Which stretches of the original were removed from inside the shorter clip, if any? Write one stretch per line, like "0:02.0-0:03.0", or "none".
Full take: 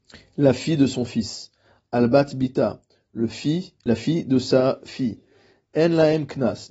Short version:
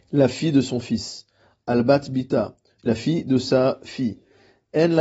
0:03.0-0:03.8